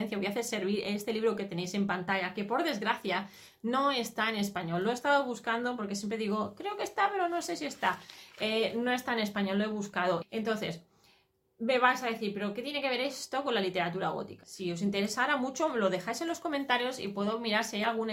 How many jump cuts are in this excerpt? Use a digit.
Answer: 2